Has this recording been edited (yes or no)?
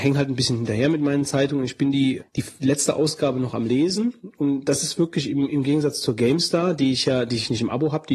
yes